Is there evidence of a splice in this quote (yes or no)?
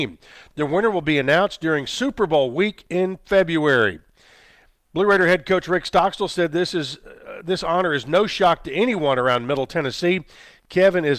no